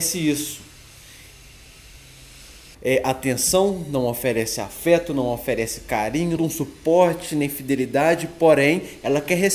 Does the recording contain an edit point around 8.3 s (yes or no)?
no